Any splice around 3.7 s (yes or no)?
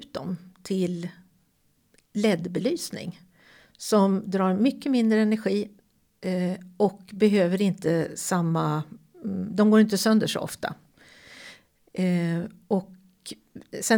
no